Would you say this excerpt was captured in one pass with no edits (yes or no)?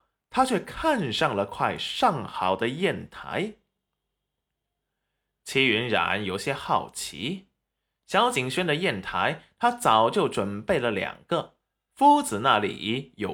yes